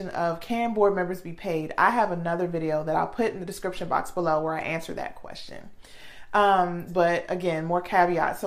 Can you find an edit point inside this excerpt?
yes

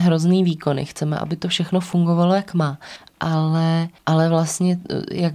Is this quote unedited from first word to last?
no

